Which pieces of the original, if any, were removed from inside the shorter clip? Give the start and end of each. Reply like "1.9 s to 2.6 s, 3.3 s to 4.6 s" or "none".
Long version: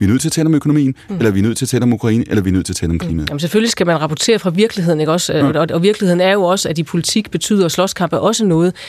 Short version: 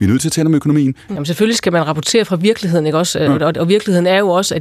1.2 s to 3.3 s

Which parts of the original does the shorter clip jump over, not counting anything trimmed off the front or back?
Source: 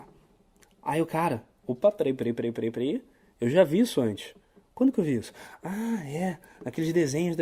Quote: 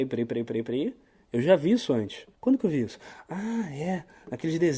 4.4 s to 4.7 s

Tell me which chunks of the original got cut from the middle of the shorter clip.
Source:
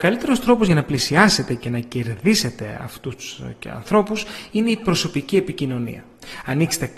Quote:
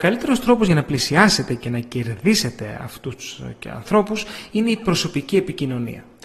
none

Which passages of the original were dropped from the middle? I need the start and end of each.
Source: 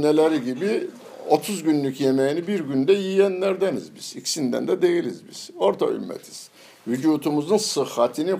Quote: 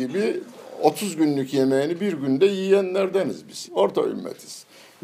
4.1 s to 5.5 s

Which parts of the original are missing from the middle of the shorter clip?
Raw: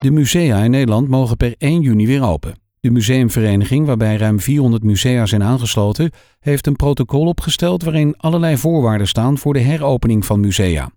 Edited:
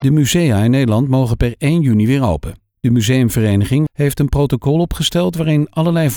3.9 s to 6.3 s

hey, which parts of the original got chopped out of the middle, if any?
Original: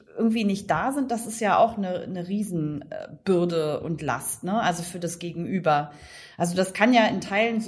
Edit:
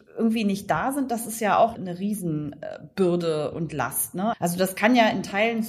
1.7 s to 2.0 s, 4.6 s to 6.3 s

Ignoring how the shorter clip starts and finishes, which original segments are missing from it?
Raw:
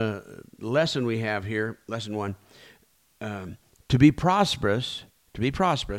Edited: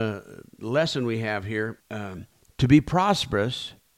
1.8 s to 3.1 s

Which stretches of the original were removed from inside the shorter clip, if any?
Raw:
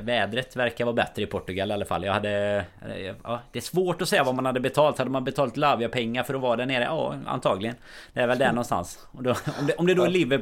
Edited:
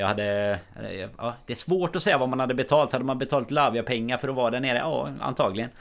none

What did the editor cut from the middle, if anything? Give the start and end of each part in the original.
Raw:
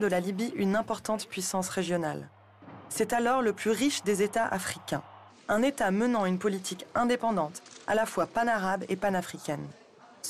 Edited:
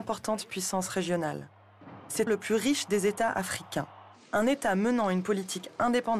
3.1 s to 3.4 s

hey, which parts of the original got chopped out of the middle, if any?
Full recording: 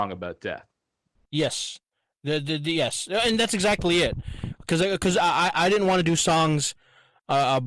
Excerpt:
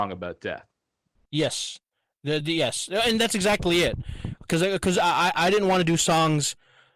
2.4 s to 2.6 s

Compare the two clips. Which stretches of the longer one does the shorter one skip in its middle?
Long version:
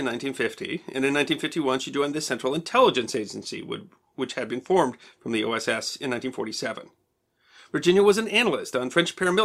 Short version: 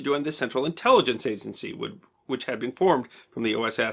none

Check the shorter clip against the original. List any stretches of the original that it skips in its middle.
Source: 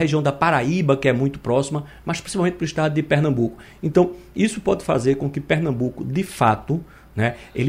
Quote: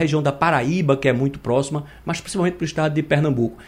none

